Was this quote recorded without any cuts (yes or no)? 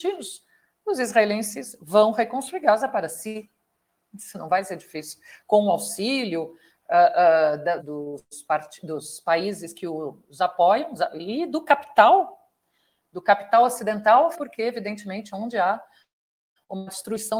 no